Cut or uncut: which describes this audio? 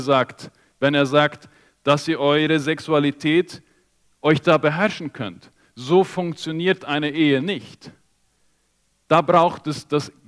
uncut